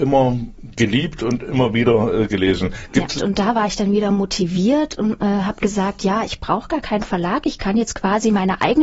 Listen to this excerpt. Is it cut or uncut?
cut